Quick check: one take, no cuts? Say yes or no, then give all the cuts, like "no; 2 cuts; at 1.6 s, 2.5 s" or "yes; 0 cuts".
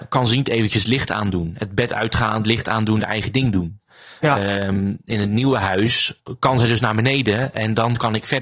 yes; 0 cuts